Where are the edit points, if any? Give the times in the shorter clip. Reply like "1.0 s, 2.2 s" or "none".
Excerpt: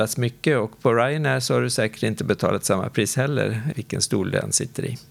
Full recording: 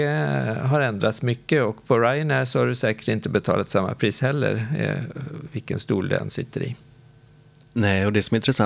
3.7 s